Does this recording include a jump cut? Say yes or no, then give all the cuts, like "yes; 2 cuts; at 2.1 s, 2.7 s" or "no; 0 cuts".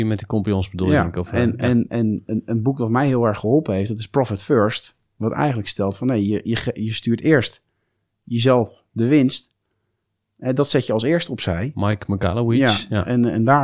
no; 0 cuts